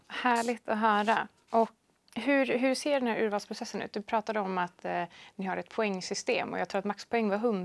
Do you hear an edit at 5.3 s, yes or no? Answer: no